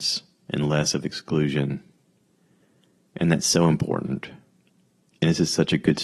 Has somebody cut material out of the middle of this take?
no; 0 cuts

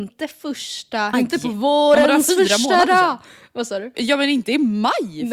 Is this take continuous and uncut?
no; 2 cuts; at 1.1 s, 3.9 s

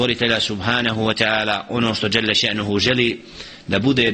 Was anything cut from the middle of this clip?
no; 0 cuts

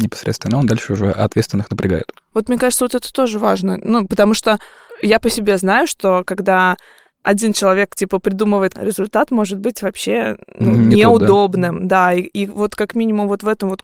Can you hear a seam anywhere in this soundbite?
yes; 1 cut; at 8.7 s

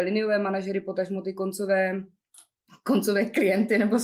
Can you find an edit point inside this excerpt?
no; 0 cuts

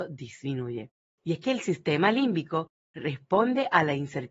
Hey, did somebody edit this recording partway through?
yes; 1 cut; at 1.2 s

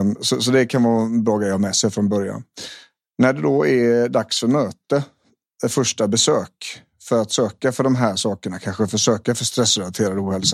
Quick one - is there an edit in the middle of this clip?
no; 0 cuts

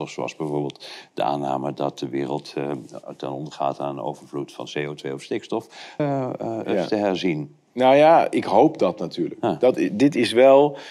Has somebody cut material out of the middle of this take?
yes; 1 cut; at 6.0 s

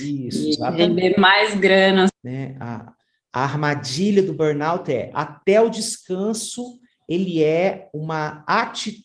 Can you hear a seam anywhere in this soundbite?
yes; 1 cut; at 2.1 s

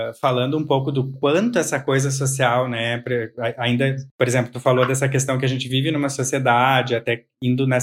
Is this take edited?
no; 0 cuts

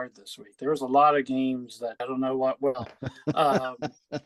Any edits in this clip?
yes; 1 cut; at 2.0 s

